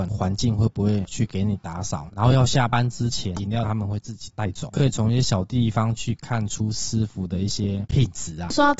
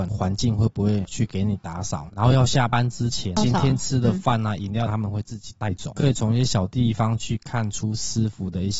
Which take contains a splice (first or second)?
first